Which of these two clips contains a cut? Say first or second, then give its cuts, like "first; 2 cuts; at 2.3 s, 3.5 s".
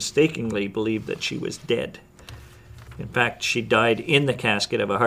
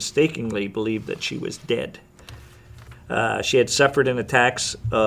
second; 1 cut; at 2.9 s